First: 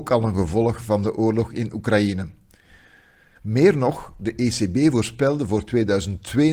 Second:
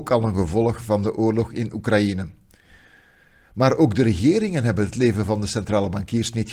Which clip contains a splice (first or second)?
first